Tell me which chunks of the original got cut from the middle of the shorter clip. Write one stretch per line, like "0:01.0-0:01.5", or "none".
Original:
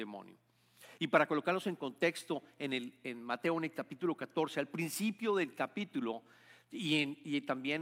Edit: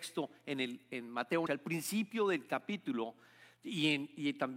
0:03.6-0:04.5